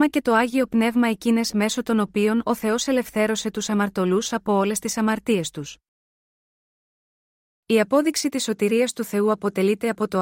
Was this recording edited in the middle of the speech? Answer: yes; 1 cut; at 7.5 s

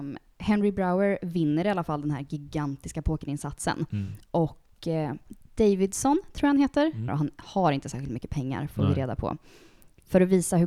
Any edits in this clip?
yes; 1 cut; at 7.1 s

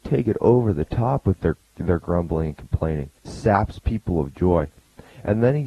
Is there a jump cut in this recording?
yes; 1 cut; at 3.2 s

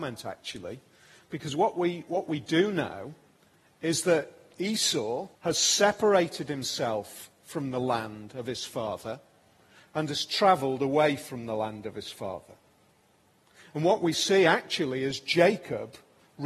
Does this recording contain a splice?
yes; 1 cut; at 5.4 s

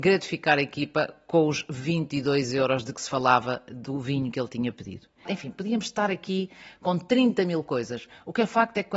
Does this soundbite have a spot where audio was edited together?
yes; 1 cut; at 5.3 s

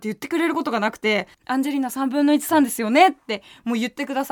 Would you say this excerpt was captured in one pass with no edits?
no; 1 cut; at 1.3 s

